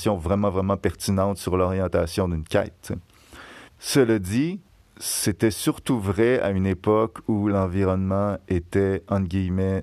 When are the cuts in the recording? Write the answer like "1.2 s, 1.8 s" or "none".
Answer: 3.7 s